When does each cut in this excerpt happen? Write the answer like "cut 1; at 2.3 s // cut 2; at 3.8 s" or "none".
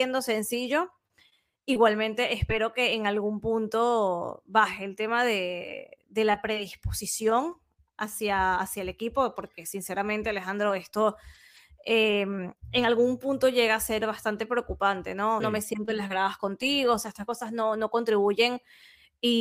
cut 1; at 15.4 s